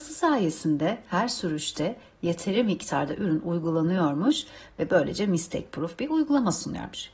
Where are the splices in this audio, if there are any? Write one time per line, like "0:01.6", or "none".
none